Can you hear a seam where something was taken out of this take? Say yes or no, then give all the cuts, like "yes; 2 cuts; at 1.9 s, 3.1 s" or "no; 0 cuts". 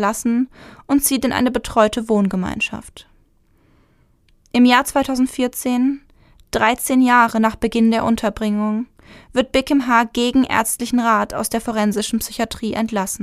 no; 0 cuts